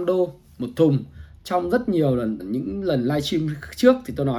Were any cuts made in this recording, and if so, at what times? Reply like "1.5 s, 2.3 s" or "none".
2.4 s